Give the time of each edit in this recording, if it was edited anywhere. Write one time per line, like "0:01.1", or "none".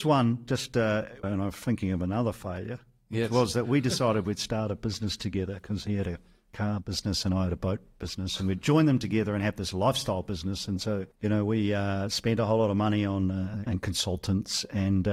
0:01.2
0:11.1
0:13.7